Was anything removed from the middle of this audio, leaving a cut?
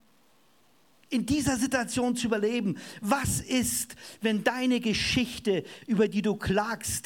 no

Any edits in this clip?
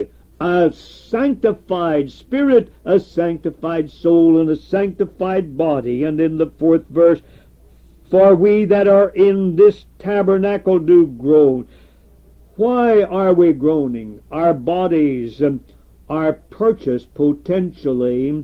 no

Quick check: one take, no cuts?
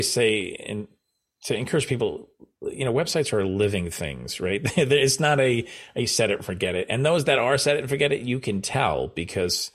yes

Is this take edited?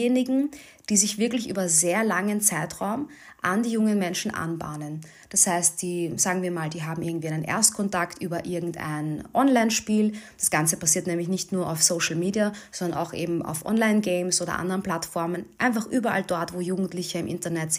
no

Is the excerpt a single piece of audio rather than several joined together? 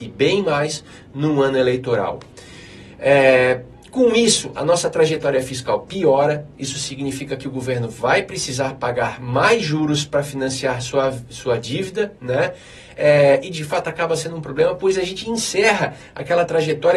yes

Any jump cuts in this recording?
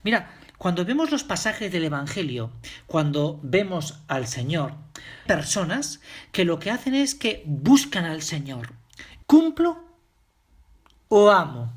yes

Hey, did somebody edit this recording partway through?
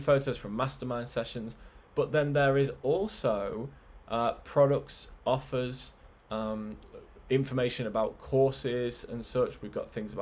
no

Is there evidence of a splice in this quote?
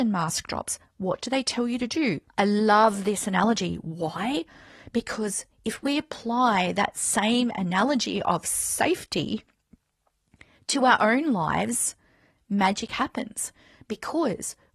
yes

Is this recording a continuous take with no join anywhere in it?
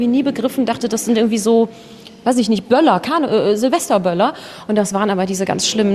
yes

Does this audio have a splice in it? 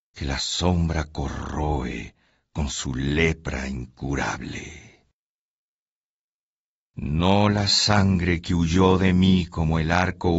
yes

